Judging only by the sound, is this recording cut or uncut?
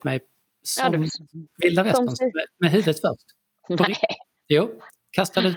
uncut